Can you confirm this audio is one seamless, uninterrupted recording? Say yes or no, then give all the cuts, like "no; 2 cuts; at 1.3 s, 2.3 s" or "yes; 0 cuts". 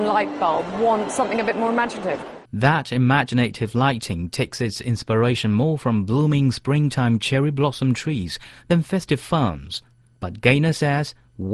no; 1 cut; at 2.4 s